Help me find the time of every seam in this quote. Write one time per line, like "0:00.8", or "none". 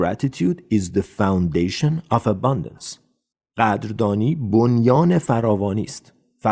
none

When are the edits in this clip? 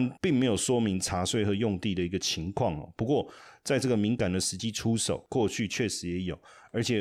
none

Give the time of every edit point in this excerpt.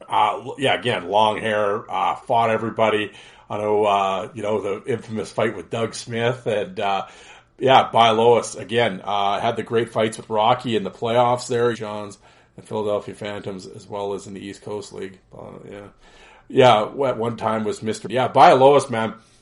0:11.7
0:18.0

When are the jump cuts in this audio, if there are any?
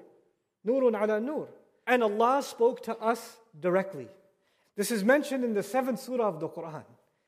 0:01.8
0:04.6

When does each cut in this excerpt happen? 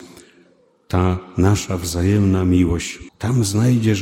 0:03.1

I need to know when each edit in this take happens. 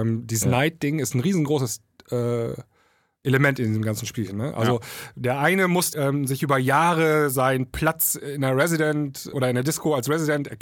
0:05.9
0:09.3

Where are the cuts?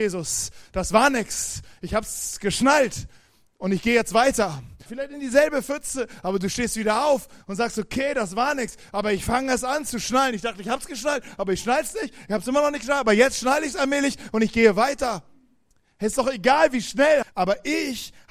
0:04.9
0:17.2

